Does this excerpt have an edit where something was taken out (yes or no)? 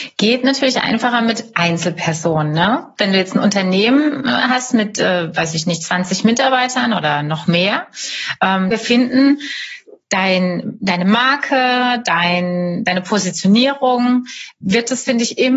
yes